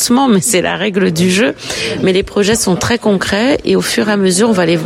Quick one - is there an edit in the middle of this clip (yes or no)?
no